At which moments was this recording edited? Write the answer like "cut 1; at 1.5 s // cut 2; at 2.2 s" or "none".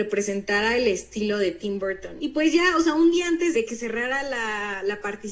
cut 1; at 2.2 s // cut 2; at 3.5 s

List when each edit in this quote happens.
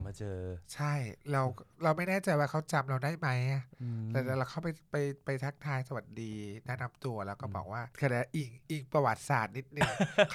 cut 1; at 4.9 s // cut 2; at 7.9 s

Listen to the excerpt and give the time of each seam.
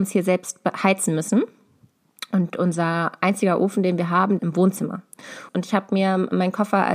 cut 1; at 4.4 s // cut 2; at 5.5 s

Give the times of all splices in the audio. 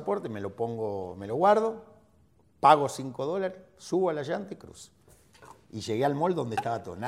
none

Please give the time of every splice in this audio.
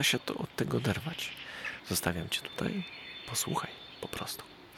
cut 1; at 1.8 s

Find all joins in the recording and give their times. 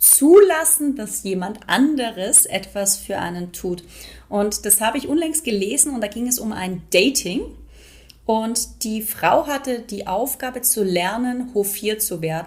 none

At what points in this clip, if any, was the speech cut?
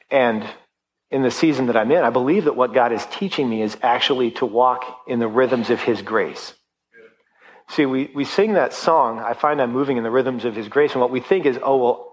none

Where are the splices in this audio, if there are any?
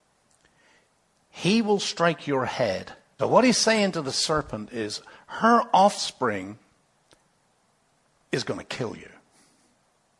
cut 1; at 3.2 s

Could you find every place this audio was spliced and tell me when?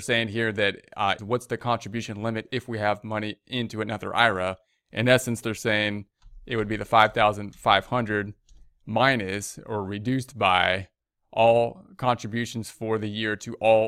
cut 1; at 1.2 s

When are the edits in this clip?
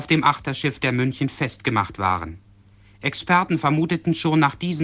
none

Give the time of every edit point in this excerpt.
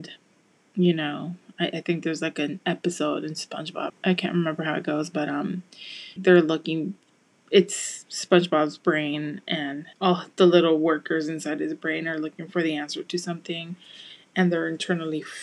cut 1; at 3.9 s // cut 2; at 6.2 s // cut 3; at 9.9 s

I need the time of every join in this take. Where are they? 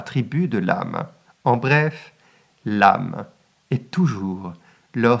cut 1; at 1.2 s

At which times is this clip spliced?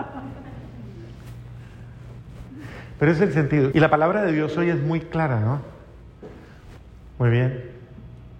cut 1; at 3.7 s // cut 2; at 7.1 s

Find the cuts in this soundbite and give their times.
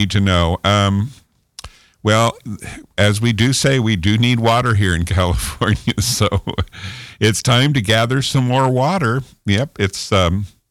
none

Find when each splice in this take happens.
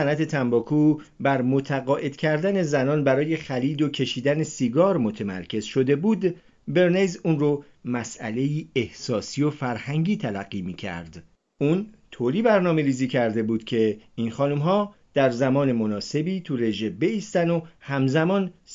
cut 1; at 11.4 s

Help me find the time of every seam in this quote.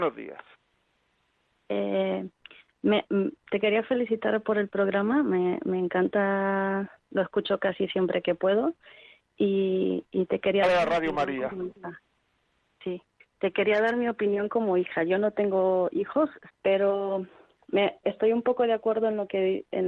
cut 1; at 16.5 s // cut 2; at 18.0 s

